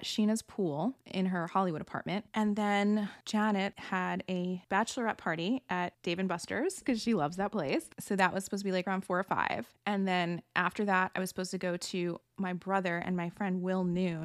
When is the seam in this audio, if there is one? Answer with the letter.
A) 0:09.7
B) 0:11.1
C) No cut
C